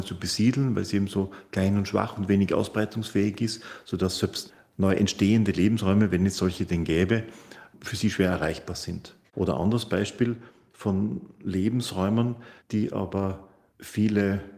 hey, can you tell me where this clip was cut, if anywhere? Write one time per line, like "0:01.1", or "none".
0:09.3
0:12.6

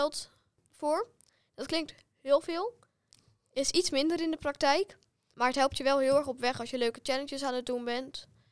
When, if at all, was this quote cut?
none

